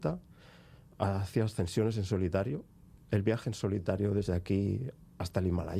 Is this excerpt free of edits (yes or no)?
yes